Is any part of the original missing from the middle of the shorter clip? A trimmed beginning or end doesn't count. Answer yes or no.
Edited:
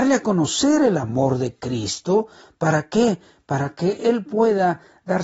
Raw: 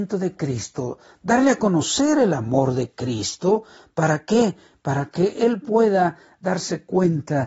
no